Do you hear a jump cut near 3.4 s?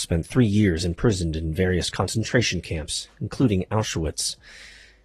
no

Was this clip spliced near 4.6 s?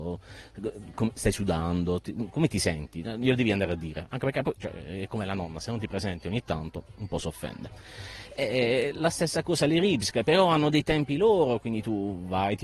no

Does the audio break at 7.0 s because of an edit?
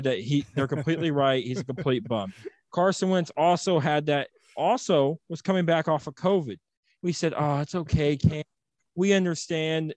yes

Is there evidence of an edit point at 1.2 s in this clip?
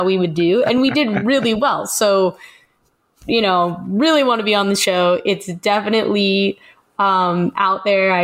no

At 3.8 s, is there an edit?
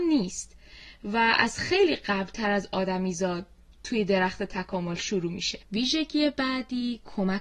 no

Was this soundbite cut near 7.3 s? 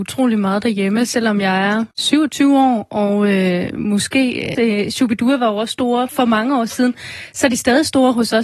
no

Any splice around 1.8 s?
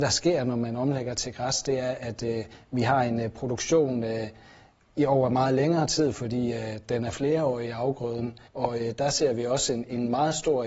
no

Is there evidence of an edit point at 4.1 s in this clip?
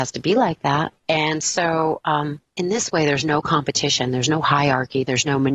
no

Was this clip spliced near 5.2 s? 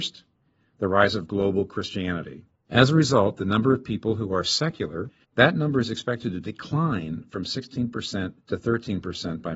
yes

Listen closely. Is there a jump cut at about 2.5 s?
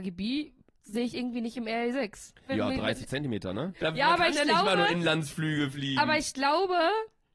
yes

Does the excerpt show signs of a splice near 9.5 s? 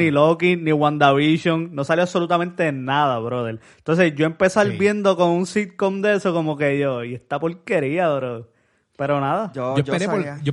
no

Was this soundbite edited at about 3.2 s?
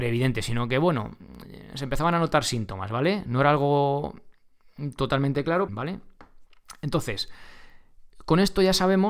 no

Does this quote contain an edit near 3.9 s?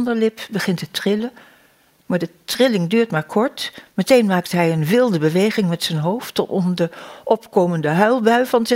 no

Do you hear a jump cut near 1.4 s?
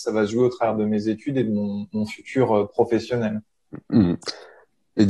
no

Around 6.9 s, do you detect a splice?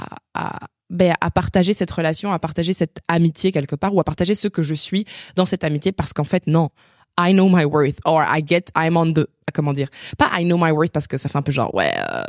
no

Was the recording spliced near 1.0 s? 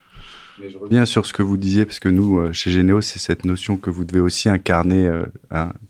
no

